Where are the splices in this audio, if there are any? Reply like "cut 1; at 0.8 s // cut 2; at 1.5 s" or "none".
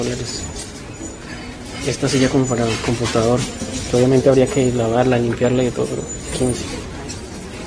none

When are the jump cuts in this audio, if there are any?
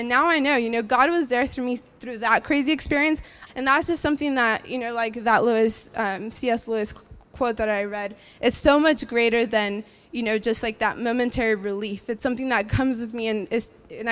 cut 1; at 3.5 s

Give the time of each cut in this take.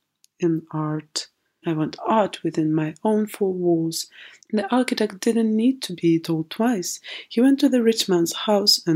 cut 1; at 1.6 s // cut 2; at 4.4 s

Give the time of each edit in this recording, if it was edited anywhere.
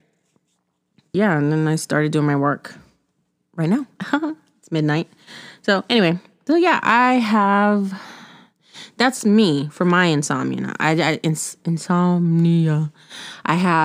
cut 1; at 1.1 s

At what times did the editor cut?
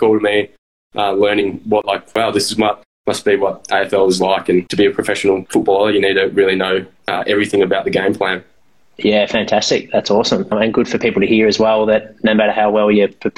none

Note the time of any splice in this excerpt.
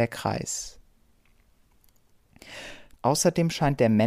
cut 1; at 2.9 s

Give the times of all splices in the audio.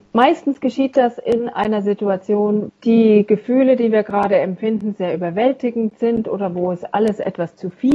cut 1; at 2.7 s

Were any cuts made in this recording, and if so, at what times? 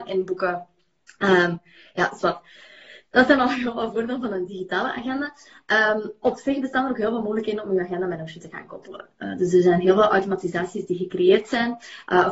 none

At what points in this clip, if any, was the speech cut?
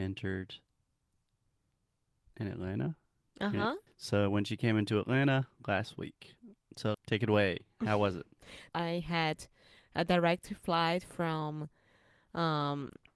cut 1; at 3.9 s // cut 2; at 6.9 s // cut 3; at 8.7 s

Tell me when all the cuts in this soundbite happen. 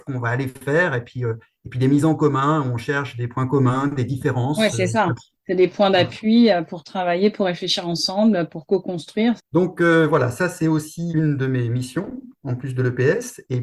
cut 1; at 9.4 s // cut 2; at 11.1 s

